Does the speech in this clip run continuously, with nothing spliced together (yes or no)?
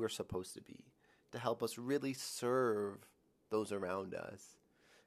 yes